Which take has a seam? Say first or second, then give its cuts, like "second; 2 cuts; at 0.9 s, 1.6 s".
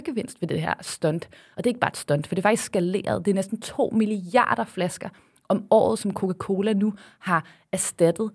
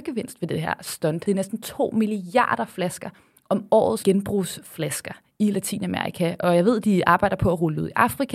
second; 2 cuts; at 1.2 s, 4.0 s